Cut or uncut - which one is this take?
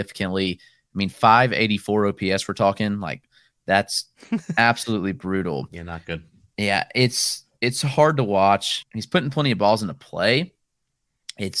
uncut